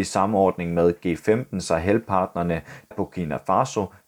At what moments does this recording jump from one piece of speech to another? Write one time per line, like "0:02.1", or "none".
0:02.9